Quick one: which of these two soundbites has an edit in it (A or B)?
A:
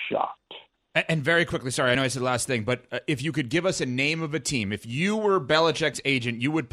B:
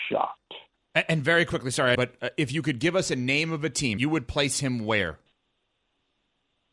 B